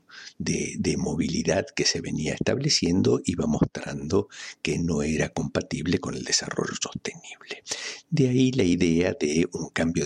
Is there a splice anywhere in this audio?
no; 0 cuts

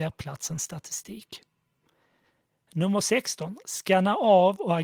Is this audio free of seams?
yes; 0 cuts

